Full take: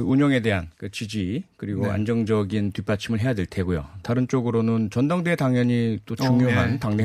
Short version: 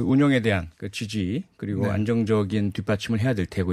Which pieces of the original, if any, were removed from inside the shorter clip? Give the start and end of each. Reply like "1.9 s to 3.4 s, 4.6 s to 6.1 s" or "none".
none

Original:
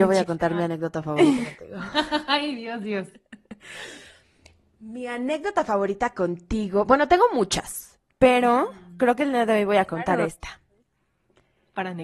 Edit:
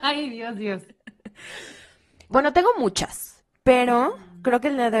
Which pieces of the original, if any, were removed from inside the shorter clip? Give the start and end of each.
4.5 s to 6.8 s

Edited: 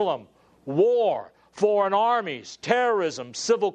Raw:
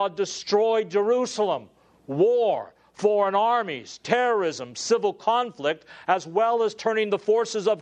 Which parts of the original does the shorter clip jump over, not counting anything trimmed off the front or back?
none

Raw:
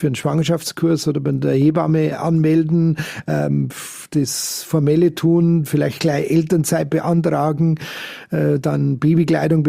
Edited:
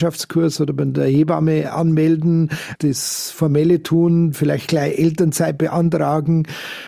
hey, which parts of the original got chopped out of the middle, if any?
3.2 s to 4.1 s

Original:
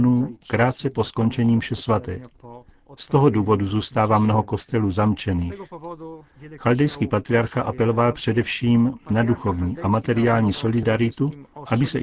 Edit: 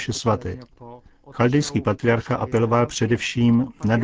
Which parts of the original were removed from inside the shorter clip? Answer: 2.9 s to 6.6 s

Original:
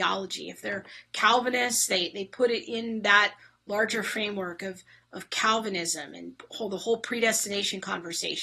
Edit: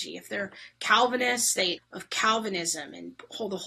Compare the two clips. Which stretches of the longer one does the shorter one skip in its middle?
2.1 s to 5.0 s

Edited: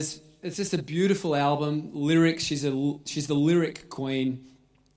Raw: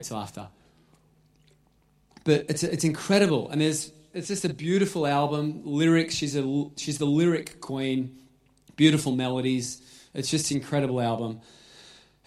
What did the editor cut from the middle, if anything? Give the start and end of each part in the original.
none

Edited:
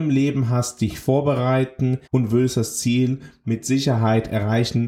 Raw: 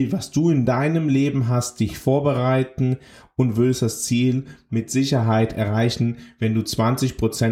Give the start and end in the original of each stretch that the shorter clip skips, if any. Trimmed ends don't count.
3.0 s to 3.3 s

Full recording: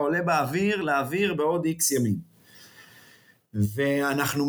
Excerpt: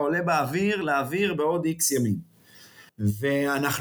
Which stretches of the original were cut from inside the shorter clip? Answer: 2.9 s to 3.4 s

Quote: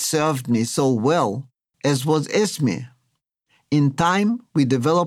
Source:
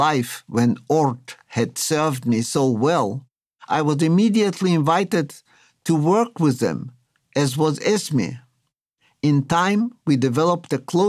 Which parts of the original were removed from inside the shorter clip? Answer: 3.5 s to 7.3 s

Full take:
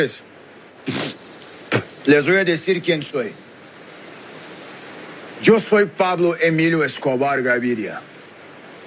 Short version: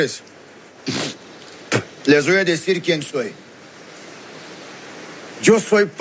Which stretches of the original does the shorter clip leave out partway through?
none

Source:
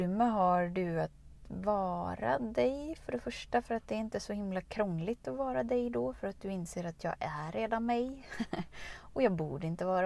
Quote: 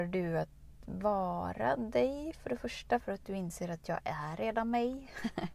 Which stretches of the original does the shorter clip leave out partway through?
3.6 s to 6.2 s

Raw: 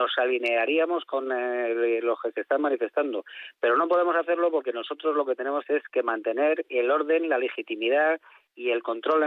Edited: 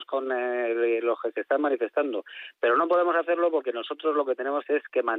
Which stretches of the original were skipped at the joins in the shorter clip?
none

